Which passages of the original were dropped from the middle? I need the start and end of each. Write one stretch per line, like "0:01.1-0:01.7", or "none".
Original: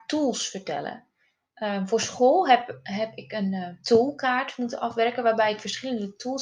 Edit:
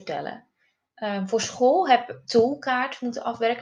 0:02.8-0:03.8

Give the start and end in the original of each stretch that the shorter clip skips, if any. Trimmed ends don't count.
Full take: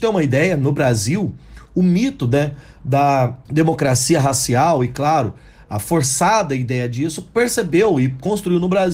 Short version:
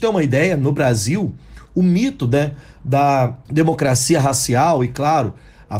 none

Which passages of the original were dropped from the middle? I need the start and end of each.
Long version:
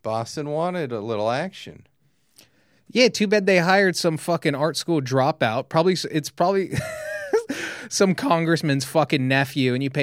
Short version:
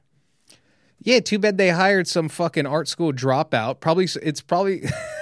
none

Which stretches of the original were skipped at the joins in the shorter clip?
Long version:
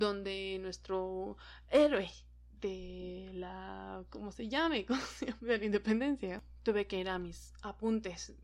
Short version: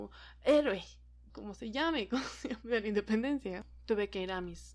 0:02.6-0:04.1

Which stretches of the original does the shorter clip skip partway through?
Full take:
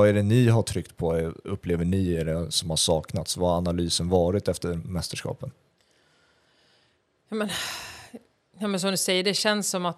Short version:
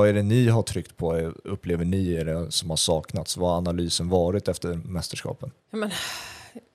0:05.6-0:07.2

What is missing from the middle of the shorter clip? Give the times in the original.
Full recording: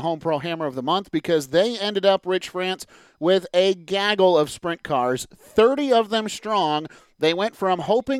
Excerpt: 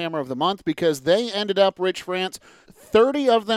0:03.1-0:05.3

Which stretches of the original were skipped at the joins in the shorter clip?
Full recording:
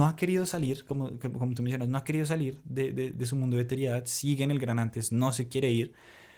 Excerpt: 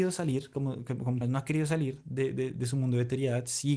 0:01.6-0:01.8

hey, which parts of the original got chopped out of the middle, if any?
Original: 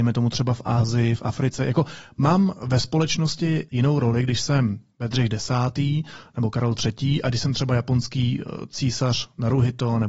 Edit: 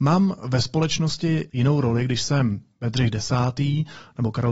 none

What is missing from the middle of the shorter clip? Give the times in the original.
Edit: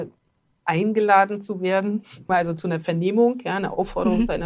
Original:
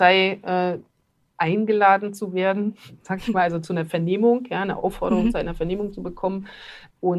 0:03.0-0:03.3

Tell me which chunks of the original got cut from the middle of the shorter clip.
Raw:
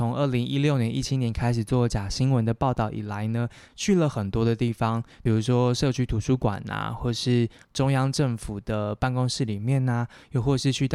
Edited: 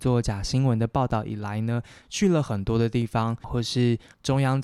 0:05.1-0:06.9

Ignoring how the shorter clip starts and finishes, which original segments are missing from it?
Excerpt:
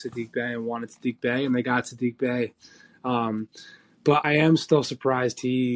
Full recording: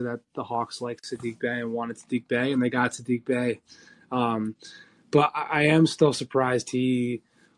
0:05.3-0:05.5

